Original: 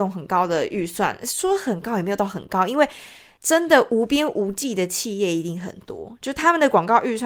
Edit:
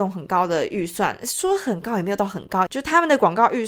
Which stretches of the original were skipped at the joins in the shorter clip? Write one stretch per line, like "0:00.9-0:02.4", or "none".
0:02.7-0:06.2